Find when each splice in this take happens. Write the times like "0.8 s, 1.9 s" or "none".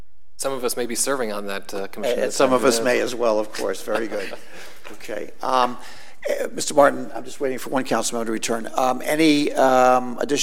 none